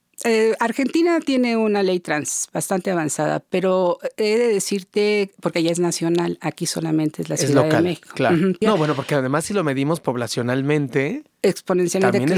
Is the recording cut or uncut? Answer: cut